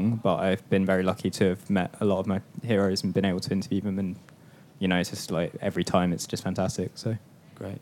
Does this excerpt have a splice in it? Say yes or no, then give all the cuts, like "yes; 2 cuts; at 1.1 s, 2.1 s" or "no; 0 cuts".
no; 0 cuts